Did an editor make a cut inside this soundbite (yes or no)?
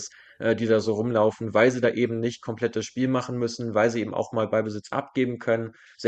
no